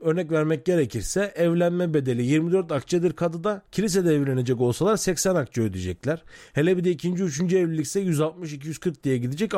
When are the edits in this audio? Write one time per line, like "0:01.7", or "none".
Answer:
0:03.7

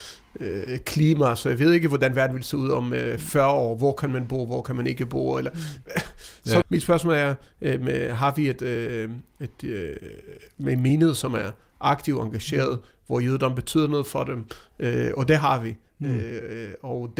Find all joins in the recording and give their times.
0:06.6

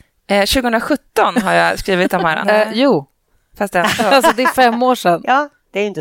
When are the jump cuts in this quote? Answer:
0:02.4

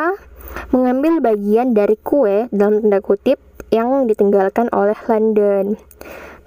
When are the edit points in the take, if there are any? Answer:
none

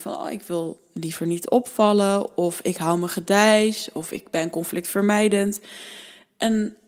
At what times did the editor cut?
none

